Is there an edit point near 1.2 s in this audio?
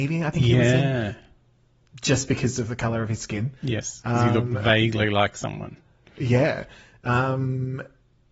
no; 0 cuts

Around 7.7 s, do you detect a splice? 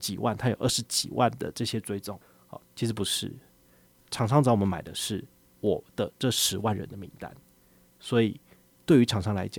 no; 1 cut; at 2.6 s

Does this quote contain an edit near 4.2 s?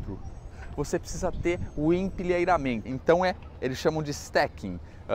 no; 1 cut; at 2.9 s

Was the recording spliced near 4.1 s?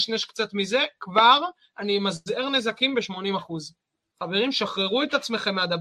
yes; 1 cut; at 4.1 s

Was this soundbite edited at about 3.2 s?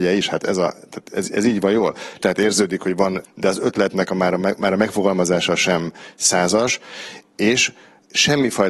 yes; 2 cuts; at 2.2 s, 3.2 s

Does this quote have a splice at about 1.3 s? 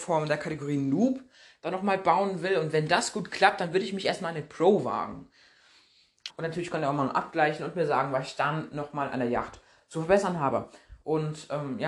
no; 1 cut; at 6.3 s

